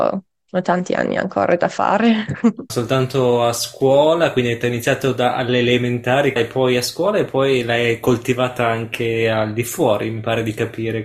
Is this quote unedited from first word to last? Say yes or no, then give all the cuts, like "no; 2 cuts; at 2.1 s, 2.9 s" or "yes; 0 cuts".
no; 2 cuts; at 2.7 s, 6.4 s